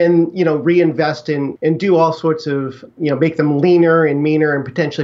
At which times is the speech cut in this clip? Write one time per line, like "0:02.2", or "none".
0:01.6
0:02.9